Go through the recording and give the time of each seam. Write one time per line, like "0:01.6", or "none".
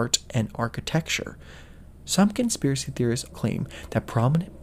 0:03.3